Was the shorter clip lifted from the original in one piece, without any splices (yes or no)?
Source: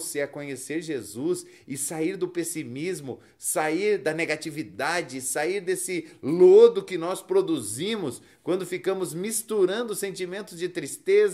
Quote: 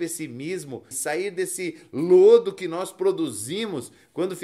no